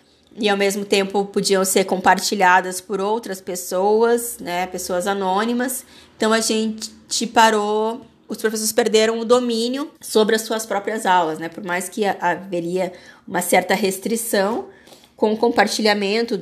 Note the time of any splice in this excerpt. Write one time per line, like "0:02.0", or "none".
0:08.3
0:10.0